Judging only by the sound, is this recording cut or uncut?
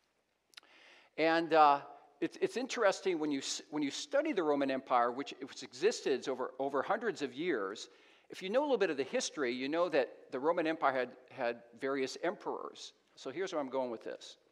cut